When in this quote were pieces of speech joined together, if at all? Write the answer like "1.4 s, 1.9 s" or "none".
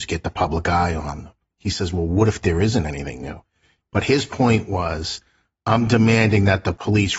3.8 s